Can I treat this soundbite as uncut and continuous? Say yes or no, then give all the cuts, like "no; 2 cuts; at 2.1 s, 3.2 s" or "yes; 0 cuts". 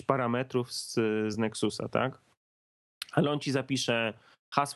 yes; 0 cuts